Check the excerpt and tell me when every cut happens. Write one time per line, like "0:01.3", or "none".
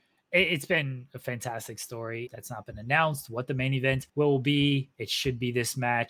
0:02.3
0:04.1